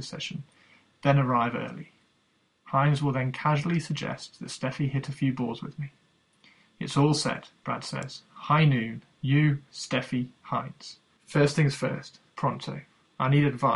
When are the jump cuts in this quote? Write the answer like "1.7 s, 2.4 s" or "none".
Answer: 9.7 s, 11.2 s, 12.3 s